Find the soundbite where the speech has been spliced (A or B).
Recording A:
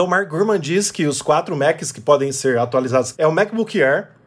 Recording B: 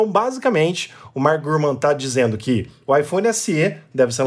A